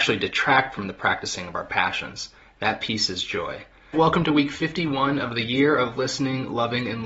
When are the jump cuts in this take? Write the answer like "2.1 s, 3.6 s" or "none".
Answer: 2.4 s, 3.9 s